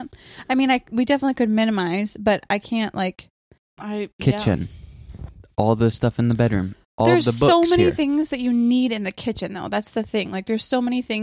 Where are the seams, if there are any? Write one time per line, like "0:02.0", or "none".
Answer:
0:03.8